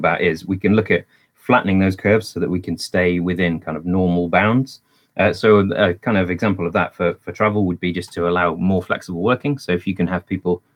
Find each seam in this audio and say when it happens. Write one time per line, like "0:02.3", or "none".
none

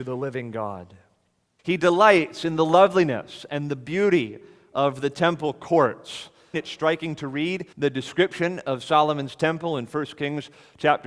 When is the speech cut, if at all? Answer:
0:01.6
0:06.5
0:07.7

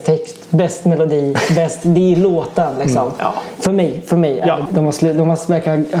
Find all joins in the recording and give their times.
0:03.6
0:04.7

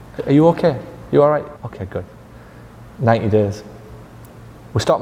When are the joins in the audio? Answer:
0:01.6

